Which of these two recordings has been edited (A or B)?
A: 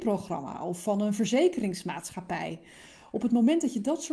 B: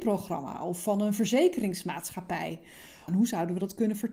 B